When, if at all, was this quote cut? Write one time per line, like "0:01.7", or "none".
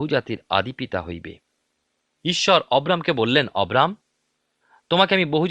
none